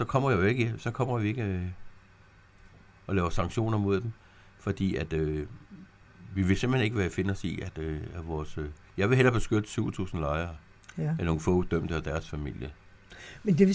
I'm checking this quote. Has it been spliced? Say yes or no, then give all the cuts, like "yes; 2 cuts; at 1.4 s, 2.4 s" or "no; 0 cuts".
no; 0 cuts